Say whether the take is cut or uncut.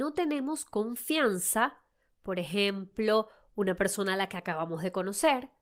uncut